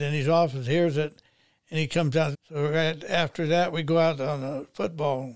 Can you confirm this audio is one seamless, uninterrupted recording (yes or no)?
no